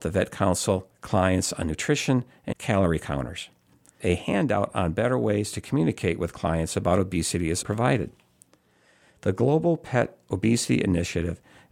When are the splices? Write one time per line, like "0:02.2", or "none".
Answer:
0:02.5
0:07.6

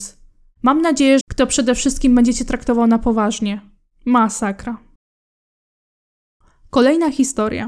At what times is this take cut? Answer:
0:01.2

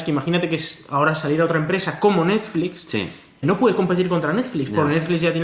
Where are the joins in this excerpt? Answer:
0:03.4

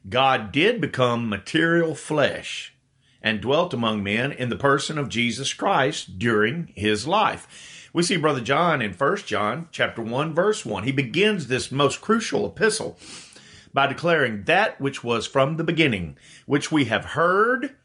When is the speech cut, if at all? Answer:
none

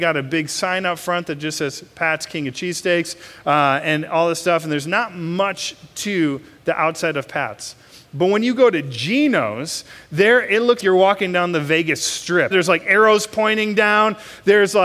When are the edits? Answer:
0:10.8
0:12.5

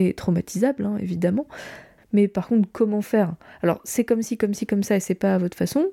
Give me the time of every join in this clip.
0:02.0

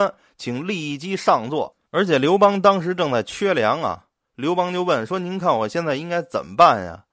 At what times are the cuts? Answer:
0:01.8

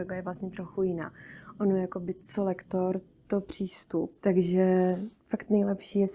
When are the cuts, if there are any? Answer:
0:04.2

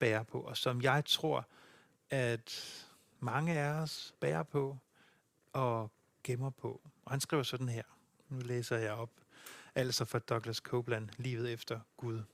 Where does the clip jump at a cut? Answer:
none

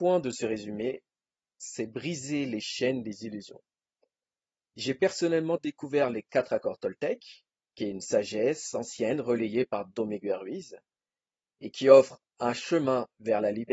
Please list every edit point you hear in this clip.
none

